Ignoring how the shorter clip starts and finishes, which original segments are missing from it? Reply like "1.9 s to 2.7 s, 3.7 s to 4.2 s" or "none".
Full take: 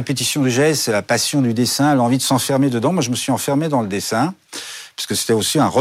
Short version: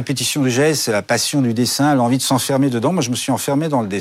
none